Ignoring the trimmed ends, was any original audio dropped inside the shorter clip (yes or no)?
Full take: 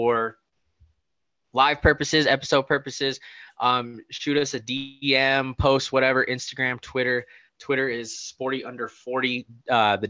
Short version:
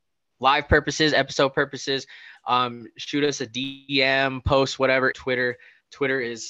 yes